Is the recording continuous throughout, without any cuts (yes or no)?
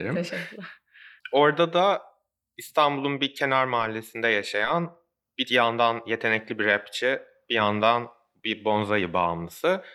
yes